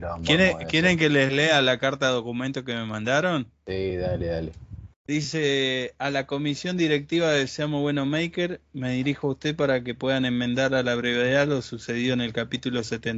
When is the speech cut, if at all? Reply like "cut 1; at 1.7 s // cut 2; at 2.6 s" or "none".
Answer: none